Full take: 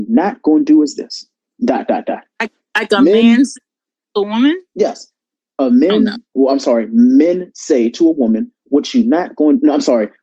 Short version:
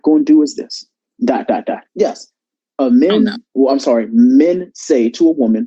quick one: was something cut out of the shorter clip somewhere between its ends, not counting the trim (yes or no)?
yes